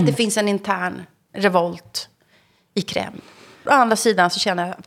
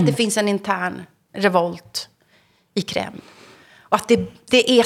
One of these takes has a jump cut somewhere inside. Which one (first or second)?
first